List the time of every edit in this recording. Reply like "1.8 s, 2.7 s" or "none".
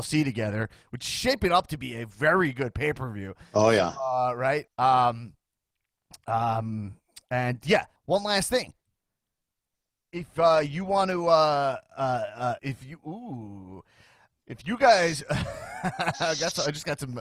4.7 s, 8.0 s, 12.6 s